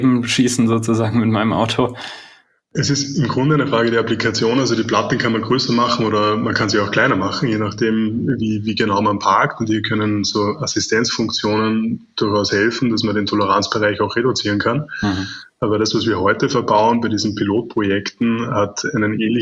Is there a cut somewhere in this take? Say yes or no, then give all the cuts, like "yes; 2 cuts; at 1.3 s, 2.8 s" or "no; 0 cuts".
no; 0 cuts